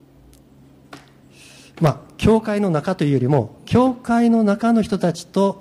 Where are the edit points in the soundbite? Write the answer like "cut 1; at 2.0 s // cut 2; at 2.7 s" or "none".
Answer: none